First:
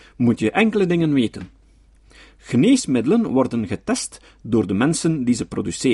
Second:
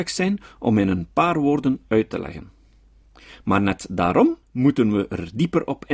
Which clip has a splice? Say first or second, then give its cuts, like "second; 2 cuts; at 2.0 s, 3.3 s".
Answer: second; 2 cuts; at 3.3 s, 4.4 s